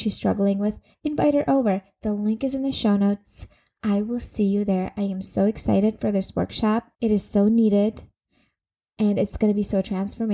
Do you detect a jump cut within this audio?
yes; 1 cut; at 6.9 s

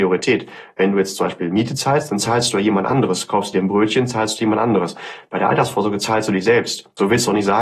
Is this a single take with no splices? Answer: yes; 0 cuts

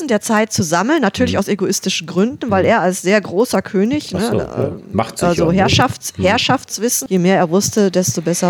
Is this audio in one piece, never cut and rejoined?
no; 1 cut; at 7.1 s

